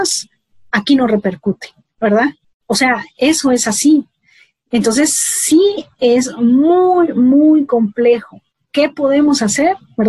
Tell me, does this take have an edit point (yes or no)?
yes